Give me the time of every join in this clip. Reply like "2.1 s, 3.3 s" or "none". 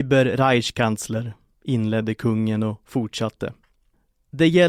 none

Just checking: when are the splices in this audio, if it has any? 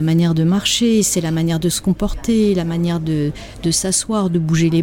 none

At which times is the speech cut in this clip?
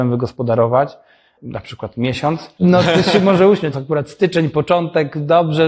2.6 s, 3.7 s

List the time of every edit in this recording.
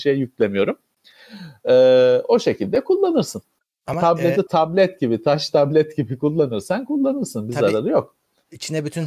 4.5 s

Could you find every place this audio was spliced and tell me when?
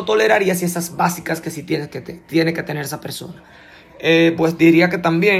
none

